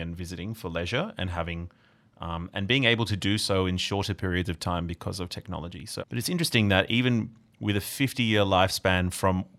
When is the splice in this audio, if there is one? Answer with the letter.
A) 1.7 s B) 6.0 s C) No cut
B